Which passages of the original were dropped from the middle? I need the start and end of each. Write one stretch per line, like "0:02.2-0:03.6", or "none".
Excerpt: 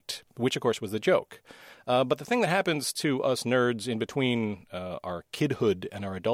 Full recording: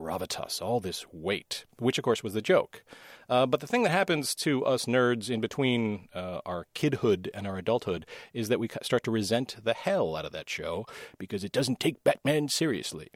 none